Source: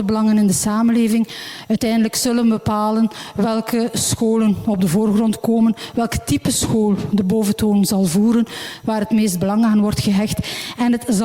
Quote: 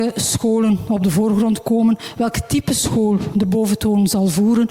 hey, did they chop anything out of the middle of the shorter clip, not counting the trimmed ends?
no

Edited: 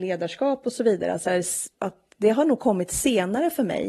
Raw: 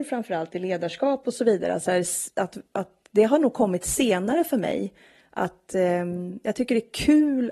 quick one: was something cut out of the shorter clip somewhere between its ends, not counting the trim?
yes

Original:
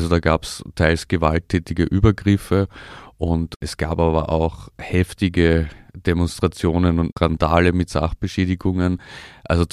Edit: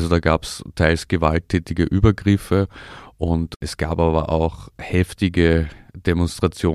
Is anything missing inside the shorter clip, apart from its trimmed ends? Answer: no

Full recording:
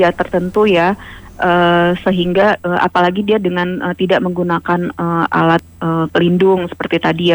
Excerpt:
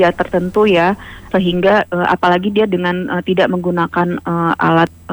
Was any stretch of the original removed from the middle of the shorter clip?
yes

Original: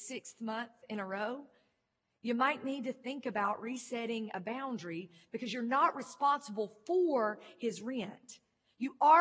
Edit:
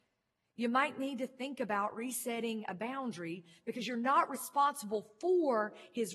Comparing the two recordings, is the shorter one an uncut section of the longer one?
yes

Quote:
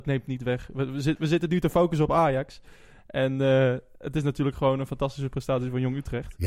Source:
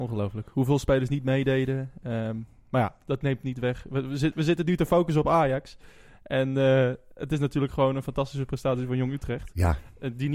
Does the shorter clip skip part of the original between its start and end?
no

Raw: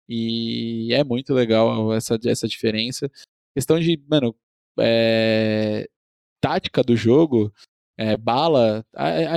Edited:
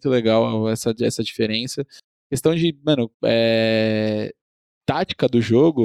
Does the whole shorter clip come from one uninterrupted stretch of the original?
no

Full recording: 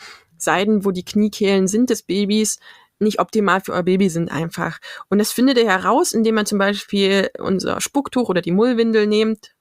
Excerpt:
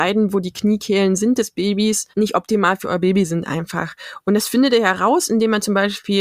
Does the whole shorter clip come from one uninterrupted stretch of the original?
no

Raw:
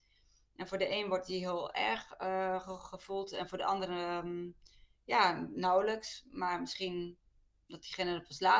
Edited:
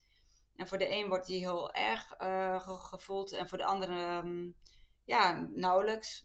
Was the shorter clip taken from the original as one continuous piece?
yes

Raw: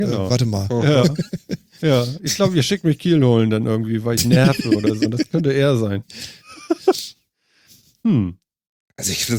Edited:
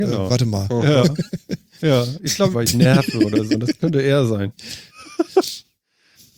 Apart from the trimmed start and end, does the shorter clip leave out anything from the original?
yes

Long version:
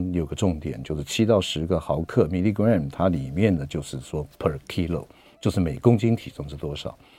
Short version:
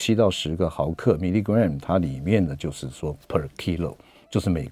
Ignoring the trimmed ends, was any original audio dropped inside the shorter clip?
no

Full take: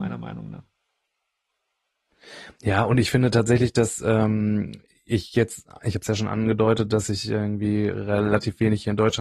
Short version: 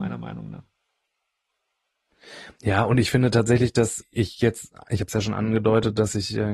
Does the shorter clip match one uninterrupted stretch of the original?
no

